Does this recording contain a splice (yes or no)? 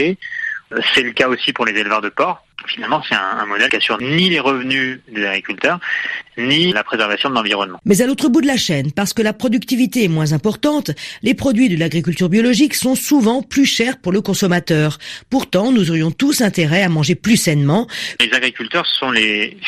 yes